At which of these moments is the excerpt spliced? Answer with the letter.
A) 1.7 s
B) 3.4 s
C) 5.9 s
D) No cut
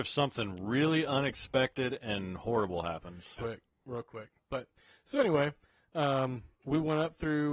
B